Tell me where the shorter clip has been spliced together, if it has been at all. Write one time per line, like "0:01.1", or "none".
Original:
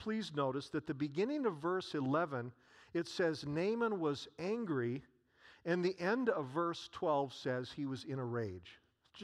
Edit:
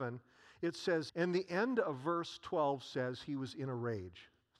0:01.1